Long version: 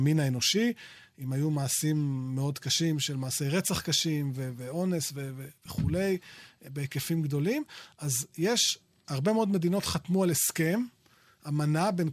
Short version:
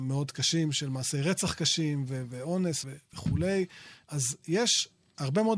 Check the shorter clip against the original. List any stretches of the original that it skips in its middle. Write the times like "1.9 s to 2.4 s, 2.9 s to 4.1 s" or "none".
5.1 s to 5.4 s, 6.6 s to 7.9 s